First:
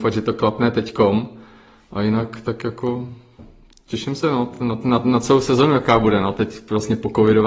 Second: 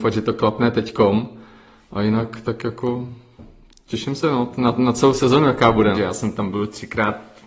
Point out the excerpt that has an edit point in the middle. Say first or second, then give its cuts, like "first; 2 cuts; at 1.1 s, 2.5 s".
second; 2 cuts; at 4.6 s, 5.9 s